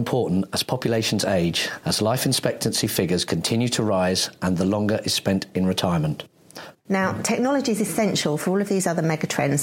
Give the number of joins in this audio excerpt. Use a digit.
2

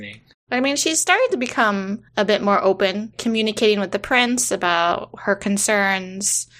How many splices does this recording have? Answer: 1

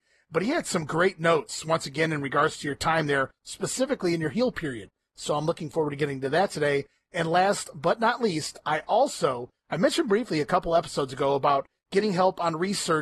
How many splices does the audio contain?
0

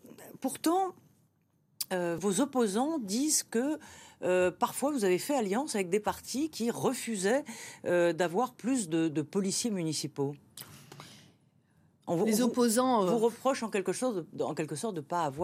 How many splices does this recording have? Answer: 1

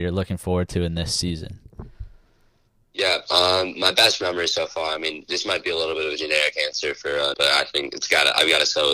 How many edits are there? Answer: 1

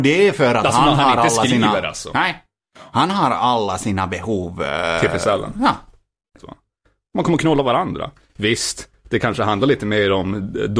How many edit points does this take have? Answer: 1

